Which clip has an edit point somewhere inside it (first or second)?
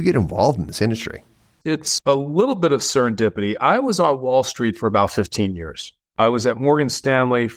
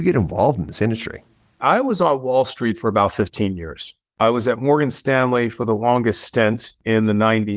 second